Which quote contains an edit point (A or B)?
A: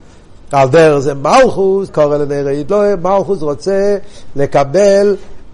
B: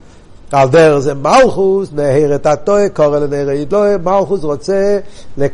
A